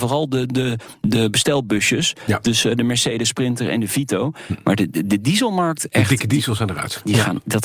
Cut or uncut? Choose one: uncut